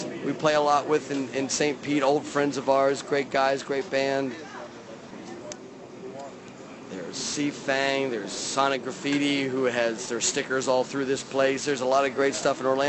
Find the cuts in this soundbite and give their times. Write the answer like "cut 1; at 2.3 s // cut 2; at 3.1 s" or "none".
cut 1; at 11.6 s